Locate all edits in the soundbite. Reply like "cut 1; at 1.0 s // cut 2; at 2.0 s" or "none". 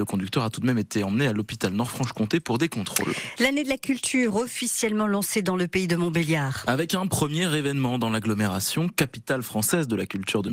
none